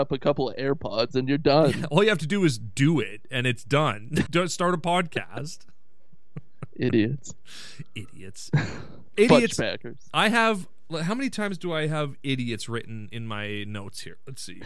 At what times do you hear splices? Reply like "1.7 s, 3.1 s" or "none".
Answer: 4.3 s